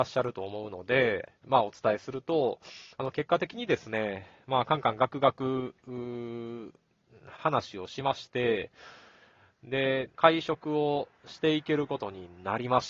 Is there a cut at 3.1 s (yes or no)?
no